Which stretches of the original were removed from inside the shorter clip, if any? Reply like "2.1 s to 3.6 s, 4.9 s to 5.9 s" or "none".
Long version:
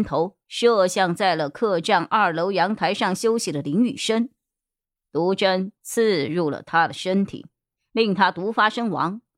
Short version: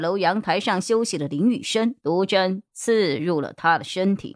4.3 s to 5.1 s